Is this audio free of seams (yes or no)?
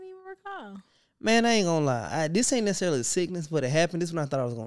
yes